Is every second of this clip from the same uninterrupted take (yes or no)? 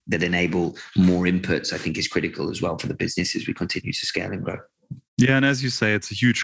no